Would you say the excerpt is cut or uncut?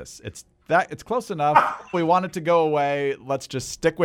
cut